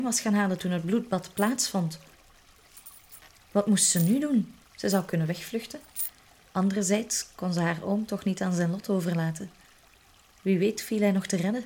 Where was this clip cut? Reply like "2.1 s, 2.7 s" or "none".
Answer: 4.6 s, 6.5 s

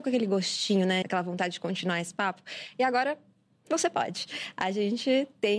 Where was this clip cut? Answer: 1.0 s

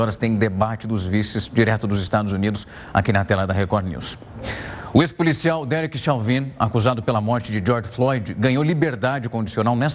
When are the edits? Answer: none

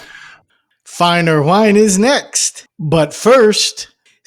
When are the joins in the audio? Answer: none

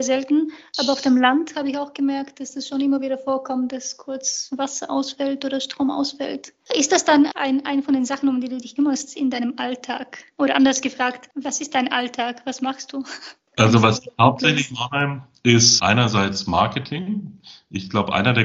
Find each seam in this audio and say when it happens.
15.8 s

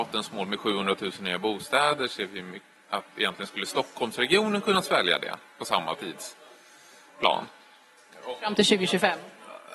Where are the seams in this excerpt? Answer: none

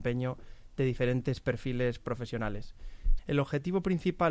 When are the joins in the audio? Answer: 3.2 s

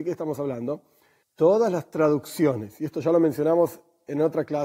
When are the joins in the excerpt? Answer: 1.2 s

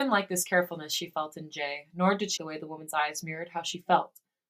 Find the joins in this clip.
2.4 s

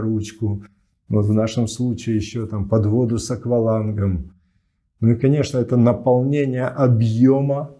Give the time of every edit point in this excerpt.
none

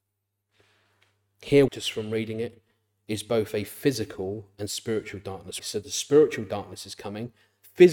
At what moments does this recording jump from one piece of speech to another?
1.7 s, 5.6 s

